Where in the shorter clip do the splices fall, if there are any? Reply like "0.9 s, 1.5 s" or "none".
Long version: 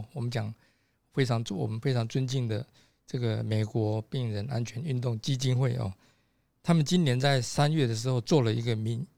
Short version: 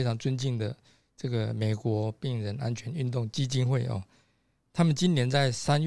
none